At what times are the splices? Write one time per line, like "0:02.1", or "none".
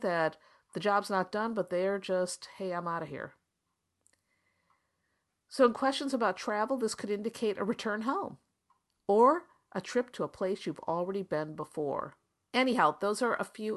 0:12.5